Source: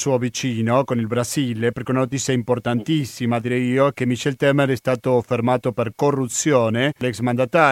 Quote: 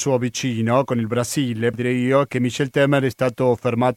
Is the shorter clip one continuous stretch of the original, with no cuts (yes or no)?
no